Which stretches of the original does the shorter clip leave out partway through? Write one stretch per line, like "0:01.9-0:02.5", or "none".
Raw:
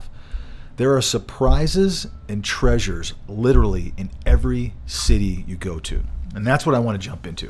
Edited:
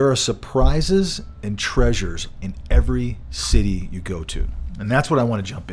0:03.3-0:04.0